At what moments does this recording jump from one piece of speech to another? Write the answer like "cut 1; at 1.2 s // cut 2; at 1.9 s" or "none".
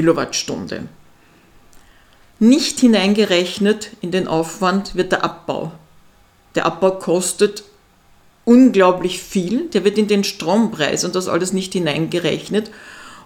none

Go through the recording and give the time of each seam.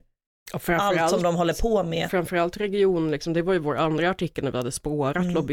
none

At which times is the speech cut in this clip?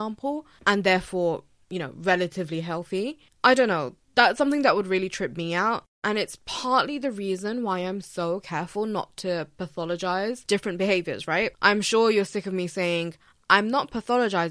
cut 1; at 3.4 s

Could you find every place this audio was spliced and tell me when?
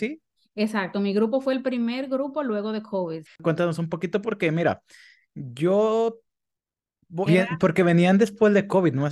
cut 1; at 3.3 s // cut 2; at 7.3 s

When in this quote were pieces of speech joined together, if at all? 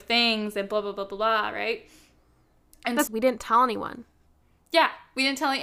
cut 1; at 3.1 s

